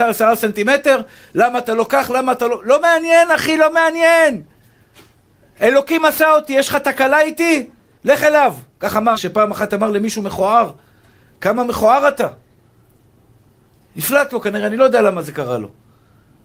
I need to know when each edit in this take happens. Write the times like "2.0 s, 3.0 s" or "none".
9.1 s